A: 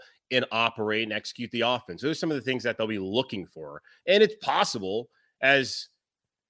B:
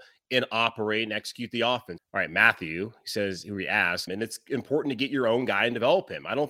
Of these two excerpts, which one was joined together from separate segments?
B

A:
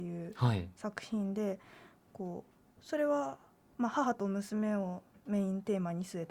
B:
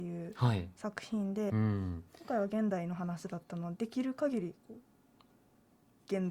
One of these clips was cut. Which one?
B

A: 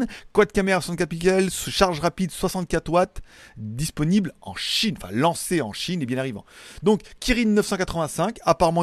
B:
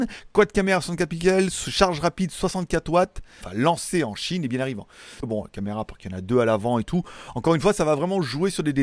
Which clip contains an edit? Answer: B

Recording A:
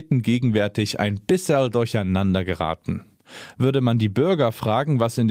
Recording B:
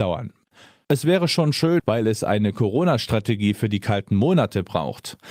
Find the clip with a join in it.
B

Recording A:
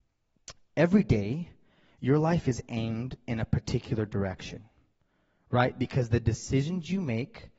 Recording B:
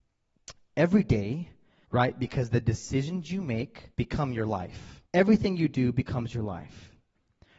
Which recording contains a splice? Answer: B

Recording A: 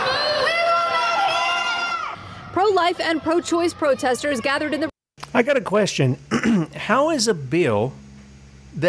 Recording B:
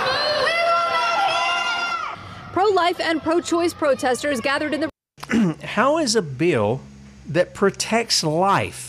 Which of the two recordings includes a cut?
B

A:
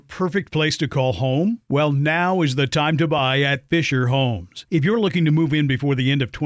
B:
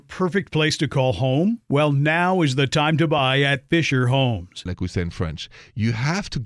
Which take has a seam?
B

